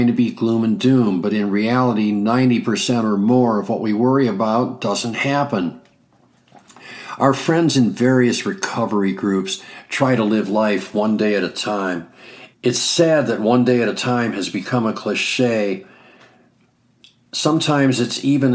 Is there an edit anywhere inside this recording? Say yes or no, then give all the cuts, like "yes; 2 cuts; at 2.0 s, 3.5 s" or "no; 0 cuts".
yes; 1 cut; at 12.5 s